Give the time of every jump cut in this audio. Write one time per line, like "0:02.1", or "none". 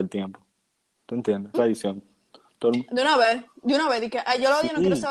0:01.5